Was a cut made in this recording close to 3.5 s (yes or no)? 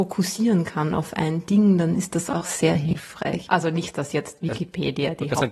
yes